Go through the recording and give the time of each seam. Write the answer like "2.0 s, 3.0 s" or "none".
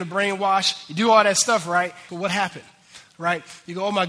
2.1 s

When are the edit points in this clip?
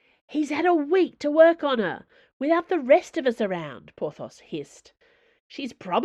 none

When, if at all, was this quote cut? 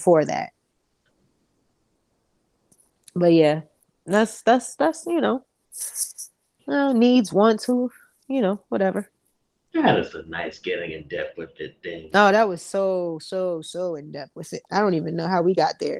none

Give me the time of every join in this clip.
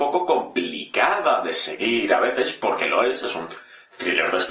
none

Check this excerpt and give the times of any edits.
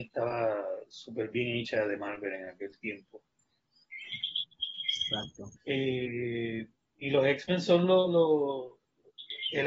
5.6 s

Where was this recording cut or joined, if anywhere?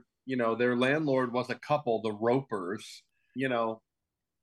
3.4 s

